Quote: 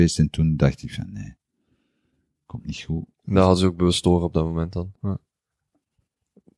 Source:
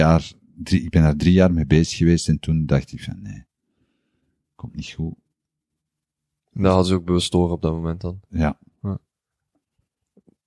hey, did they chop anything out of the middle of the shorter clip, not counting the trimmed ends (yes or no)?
yes